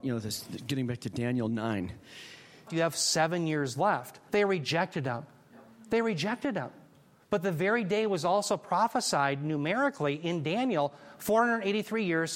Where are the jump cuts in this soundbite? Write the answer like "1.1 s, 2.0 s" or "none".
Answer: 2.7 s, 4.3 s